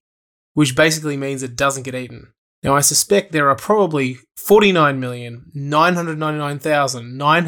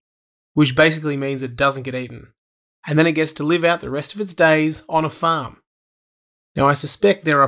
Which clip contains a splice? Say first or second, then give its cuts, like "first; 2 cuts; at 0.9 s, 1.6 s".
first; 1 cut; at 2.5 s